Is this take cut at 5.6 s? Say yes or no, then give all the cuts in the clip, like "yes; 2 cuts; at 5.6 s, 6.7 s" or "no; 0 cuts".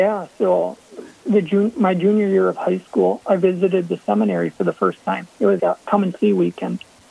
yes; 1 cut; at 5.6 s